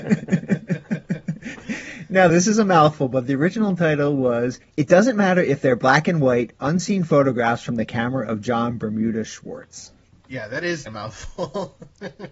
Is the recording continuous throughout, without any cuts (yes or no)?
no